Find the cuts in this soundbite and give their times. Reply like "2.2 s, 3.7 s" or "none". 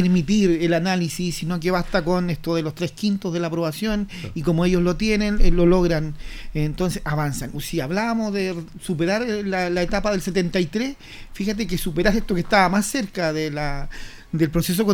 7.5 s